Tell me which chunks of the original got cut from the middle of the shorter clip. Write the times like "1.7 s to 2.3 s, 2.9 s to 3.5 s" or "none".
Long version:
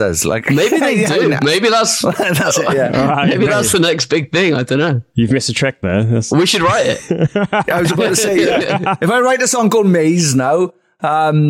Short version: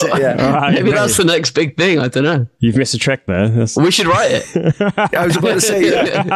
none